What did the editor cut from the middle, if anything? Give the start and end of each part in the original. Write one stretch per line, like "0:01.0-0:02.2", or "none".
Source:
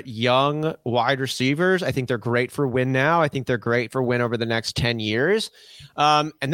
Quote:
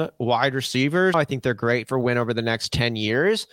0:01.8-0:03.2